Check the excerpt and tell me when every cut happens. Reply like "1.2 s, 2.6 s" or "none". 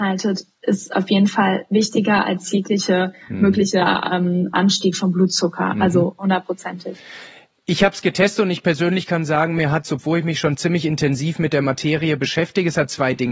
none